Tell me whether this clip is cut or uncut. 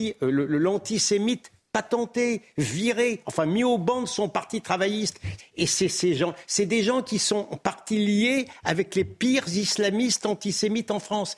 cut